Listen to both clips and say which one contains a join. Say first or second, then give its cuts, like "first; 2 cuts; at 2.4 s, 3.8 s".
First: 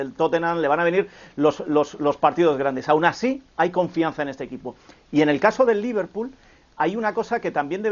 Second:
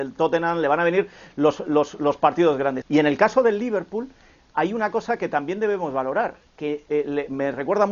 second; 1 cut; at 2.8 s